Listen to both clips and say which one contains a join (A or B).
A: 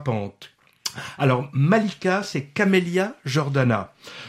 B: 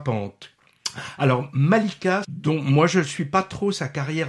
B